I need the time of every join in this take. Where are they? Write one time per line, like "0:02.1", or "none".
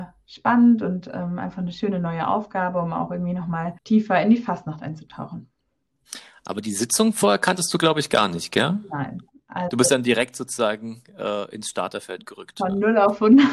0:03.8